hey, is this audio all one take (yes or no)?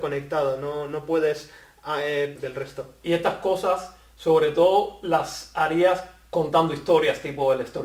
no